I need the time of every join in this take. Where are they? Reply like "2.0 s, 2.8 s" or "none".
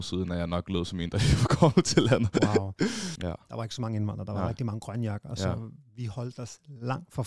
3.2 s